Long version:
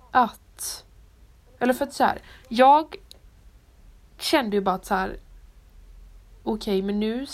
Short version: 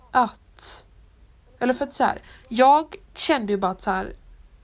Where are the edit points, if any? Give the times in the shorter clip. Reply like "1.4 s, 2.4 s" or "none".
3.0 s